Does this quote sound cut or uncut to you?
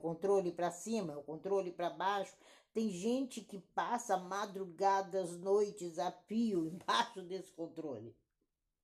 uncut